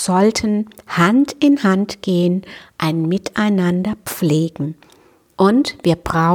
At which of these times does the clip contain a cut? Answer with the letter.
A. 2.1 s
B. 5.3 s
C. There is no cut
B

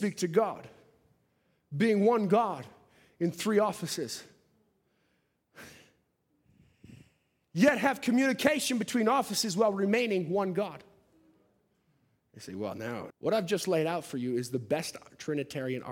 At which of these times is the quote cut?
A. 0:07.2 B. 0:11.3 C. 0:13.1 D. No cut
C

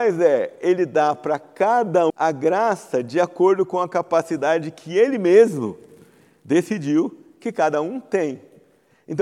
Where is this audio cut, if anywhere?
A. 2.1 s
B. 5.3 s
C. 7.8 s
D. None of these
A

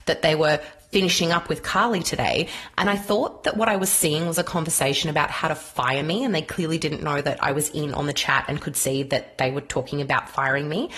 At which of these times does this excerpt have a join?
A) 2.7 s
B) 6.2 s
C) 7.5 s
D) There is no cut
D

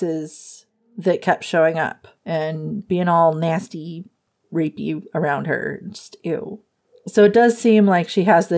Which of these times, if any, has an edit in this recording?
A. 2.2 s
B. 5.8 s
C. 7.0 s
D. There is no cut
A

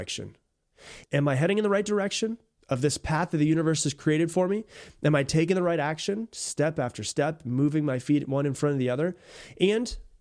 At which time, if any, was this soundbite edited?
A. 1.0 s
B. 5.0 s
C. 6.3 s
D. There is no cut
A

